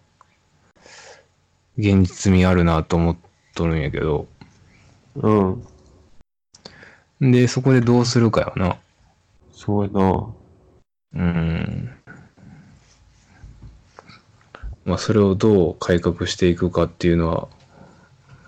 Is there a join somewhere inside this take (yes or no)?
yes